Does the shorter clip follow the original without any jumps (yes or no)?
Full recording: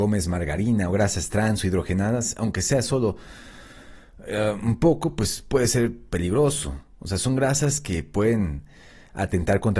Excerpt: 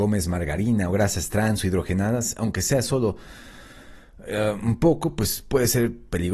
yes